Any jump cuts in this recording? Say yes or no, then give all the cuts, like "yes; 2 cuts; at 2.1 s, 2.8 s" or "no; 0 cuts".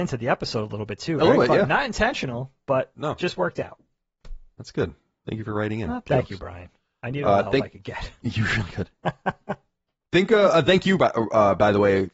yes; 1 cut; at 6.1 s